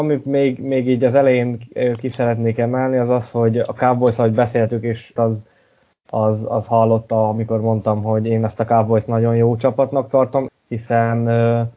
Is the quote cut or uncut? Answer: cut